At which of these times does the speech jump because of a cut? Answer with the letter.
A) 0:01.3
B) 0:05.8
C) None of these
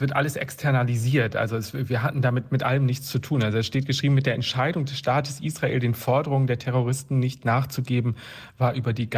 C